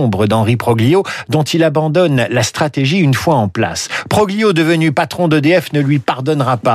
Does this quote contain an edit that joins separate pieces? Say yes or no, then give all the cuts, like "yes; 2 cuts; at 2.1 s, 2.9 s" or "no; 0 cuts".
no; 0 cuts